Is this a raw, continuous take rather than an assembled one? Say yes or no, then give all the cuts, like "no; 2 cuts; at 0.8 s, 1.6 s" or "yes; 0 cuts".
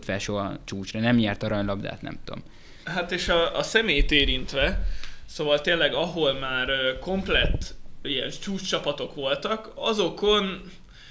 yes; 0 cuts